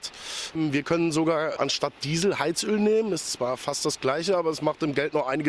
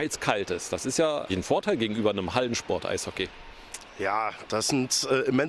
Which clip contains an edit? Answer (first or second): second